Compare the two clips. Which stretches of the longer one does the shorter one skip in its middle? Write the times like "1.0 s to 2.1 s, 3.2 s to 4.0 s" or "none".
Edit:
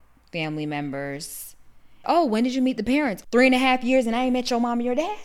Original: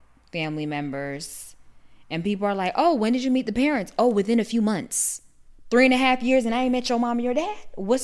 2.0 s to 2.7 s, 3.9 s to 5.6 s